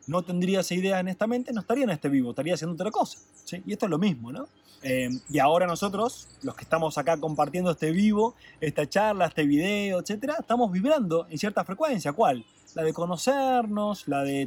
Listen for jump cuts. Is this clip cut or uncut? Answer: cut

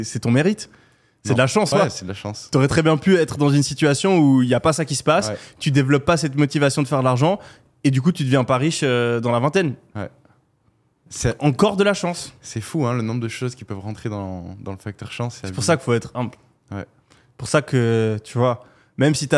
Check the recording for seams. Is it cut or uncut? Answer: cut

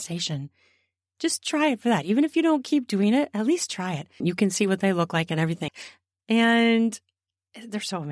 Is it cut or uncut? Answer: cut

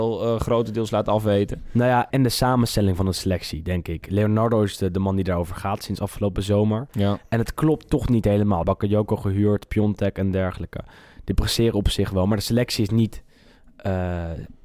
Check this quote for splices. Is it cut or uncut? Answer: cut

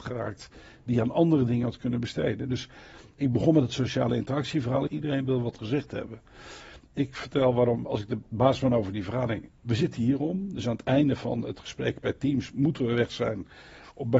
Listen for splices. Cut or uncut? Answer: cut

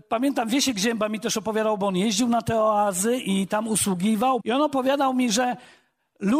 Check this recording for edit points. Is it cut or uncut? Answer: cut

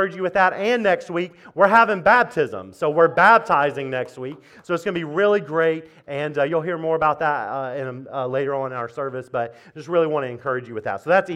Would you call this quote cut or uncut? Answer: uncut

